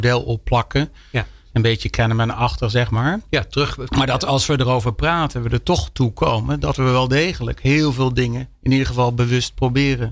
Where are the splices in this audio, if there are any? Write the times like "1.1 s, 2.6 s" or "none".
none